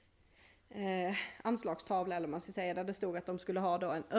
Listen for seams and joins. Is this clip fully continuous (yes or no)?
yes